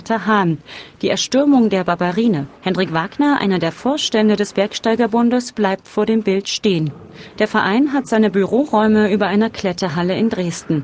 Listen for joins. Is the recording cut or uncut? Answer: cut